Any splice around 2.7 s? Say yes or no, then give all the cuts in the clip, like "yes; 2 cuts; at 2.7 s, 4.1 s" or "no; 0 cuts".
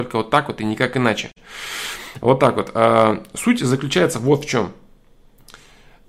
no; 0 cuts